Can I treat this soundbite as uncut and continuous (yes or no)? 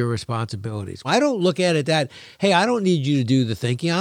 no